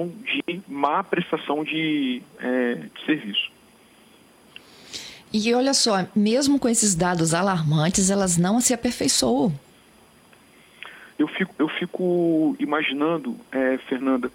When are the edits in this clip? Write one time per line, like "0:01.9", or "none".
0:11.1